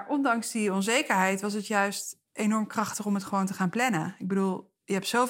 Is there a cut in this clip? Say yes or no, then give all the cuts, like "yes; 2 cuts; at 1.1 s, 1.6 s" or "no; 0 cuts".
no; 0 cuts